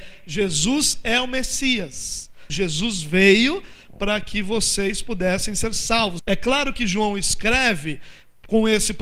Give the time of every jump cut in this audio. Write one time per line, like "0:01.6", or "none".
0:02.5
0:06.2

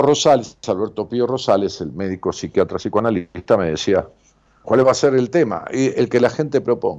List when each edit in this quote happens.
0:04.6

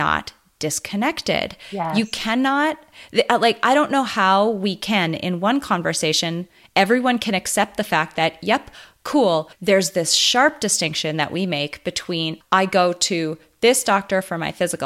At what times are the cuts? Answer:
0:09.5
0:12.4

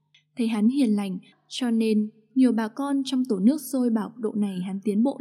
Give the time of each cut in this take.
0:01.3

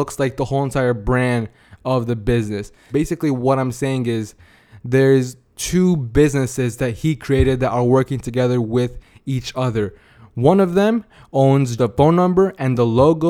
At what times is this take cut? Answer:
0:02.9
0:11.8

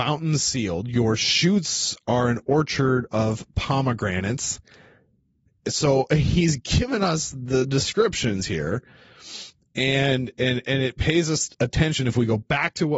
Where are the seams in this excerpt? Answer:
none

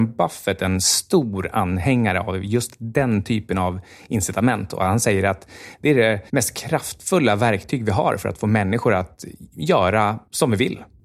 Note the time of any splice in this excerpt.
0:06.3

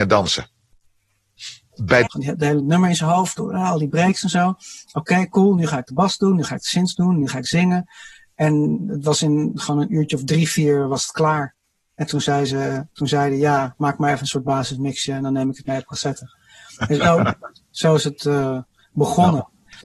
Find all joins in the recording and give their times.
0:02.1

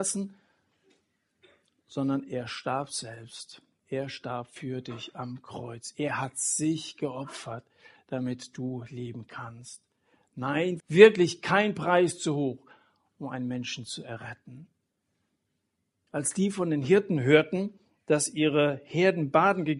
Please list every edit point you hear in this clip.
0:10.8
0:16.1

